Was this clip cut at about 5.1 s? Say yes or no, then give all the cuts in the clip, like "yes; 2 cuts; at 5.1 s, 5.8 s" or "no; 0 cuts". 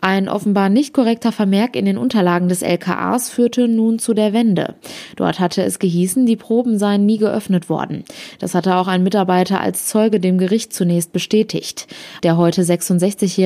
no; 1 cut; at 12.2 s